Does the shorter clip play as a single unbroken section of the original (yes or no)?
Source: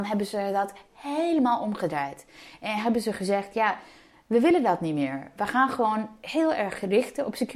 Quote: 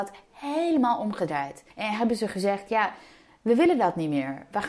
no